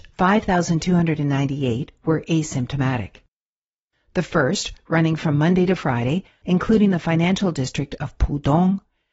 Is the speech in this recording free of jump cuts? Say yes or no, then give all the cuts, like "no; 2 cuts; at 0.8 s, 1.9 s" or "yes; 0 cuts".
no; 2 cuts; at 3.9 s, 6.4 s